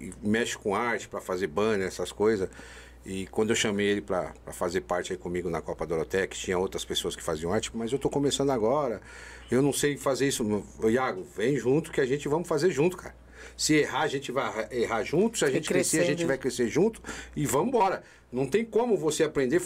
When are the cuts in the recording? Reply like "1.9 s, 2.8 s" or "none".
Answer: 7.7 s